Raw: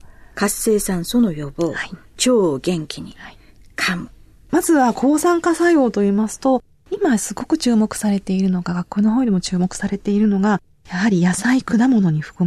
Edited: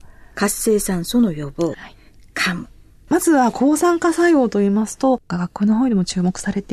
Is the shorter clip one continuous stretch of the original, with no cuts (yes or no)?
no